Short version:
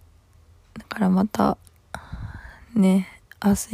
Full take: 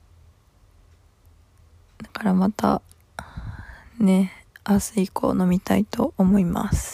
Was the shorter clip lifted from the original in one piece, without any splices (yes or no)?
yes